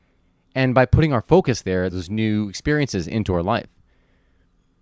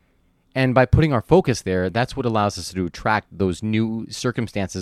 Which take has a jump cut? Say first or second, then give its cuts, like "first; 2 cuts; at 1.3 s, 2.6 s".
first; 1 cut; at 1.9 s